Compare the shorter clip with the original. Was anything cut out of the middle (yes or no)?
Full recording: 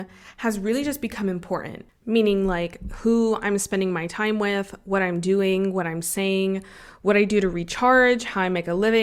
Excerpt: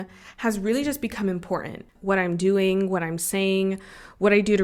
yes